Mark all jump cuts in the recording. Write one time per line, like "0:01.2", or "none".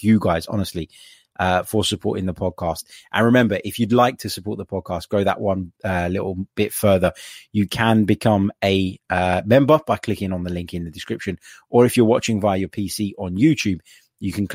none